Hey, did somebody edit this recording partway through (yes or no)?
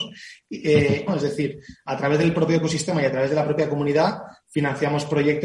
yes